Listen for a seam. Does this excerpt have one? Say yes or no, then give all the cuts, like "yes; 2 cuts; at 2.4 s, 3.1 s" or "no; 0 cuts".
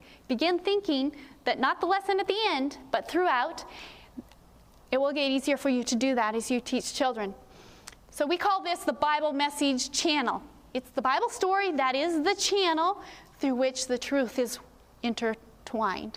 no; 0 cuts